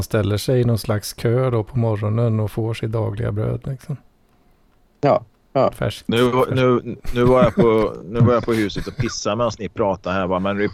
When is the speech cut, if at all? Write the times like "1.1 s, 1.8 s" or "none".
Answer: none

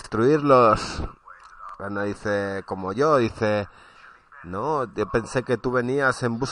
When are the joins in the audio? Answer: none

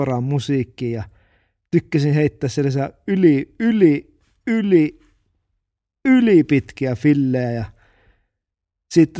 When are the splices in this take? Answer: none

